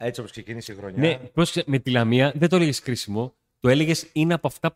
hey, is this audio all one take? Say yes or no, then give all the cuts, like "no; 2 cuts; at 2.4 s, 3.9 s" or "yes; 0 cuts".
yes; 0 cuts